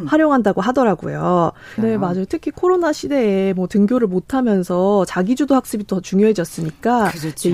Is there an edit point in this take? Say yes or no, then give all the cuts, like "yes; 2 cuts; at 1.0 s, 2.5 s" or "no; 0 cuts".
yes; 1 cut; at 1.8 s